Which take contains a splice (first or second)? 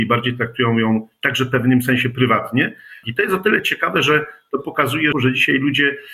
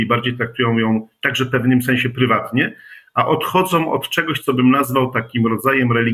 first